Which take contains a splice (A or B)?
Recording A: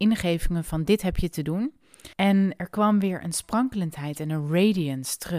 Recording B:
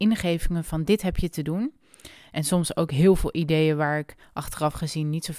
A